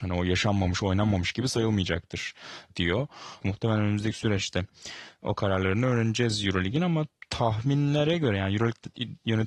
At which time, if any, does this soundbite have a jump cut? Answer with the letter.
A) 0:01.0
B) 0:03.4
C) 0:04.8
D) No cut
B